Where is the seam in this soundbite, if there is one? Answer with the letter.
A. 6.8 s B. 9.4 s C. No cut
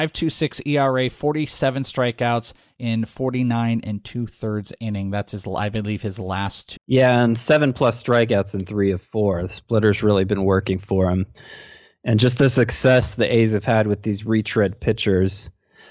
A